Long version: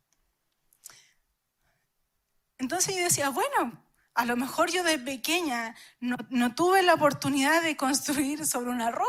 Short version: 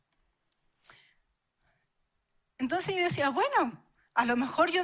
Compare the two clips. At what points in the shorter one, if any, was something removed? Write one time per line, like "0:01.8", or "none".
none